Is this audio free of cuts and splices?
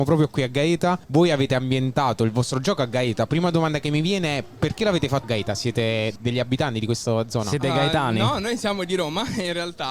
no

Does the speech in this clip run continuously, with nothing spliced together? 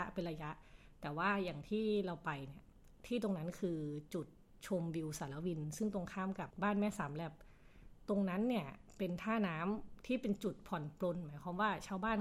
no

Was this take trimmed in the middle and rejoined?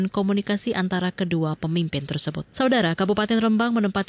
yes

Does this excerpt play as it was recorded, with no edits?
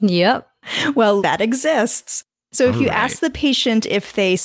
no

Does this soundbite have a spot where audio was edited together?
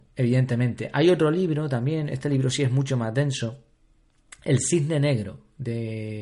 no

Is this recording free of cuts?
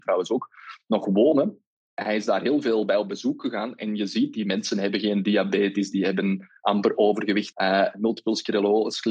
no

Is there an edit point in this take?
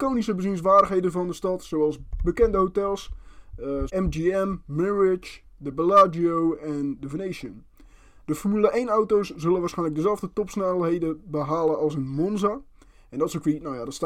yes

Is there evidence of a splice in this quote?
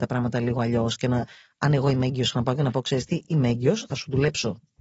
no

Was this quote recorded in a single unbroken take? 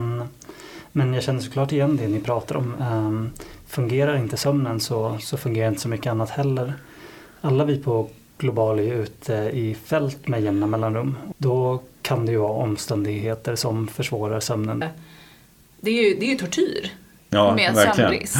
no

